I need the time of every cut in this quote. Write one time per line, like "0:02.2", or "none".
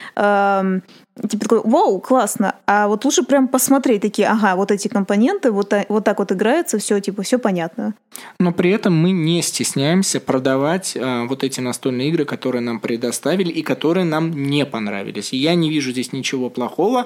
none